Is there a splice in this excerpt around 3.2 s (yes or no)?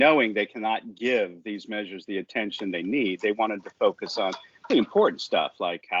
no